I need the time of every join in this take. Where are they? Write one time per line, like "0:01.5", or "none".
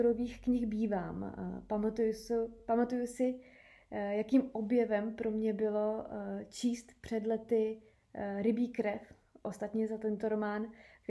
none